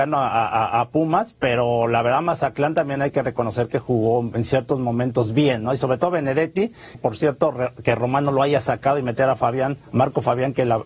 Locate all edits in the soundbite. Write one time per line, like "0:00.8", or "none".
0:06.9